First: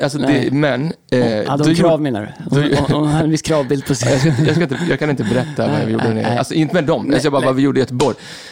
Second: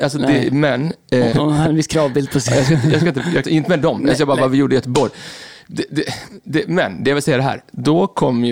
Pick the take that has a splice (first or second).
second